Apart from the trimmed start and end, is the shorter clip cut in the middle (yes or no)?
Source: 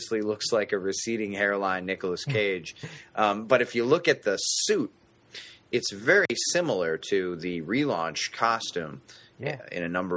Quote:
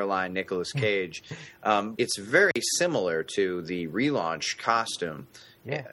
yes